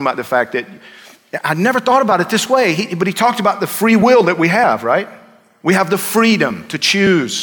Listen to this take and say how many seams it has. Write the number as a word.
zero